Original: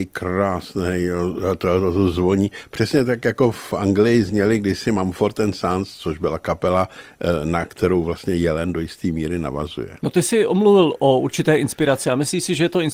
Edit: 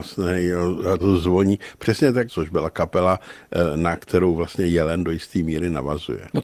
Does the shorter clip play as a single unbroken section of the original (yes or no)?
no